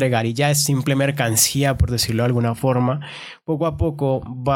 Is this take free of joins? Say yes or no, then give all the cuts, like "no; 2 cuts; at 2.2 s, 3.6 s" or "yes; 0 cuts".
yes; 0 cuts